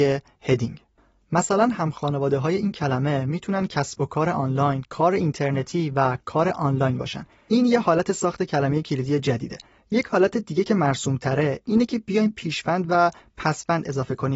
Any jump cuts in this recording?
yes; 1 cut; at 4.8 s

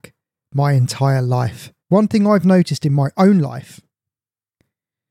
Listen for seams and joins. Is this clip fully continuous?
no; 1 cut; at 1.8 s

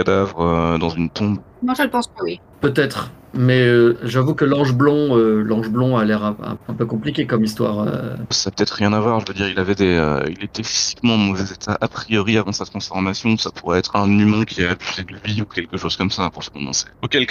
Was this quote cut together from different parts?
yes; 2 cuts; at 6.6 s, 8.3 s

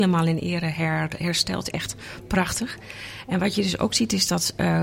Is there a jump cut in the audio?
no; 0 cuts

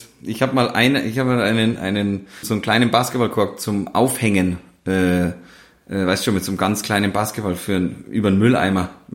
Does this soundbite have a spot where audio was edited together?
yes; 1 cut; at 2.4 s

